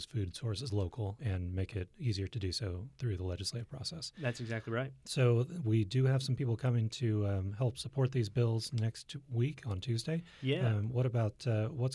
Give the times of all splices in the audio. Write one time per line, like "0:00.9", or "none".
0:01.2